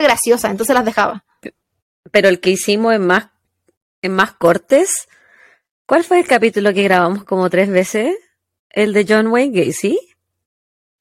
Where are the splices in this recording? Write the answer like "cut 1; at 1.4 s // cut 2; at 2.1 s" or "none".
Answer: none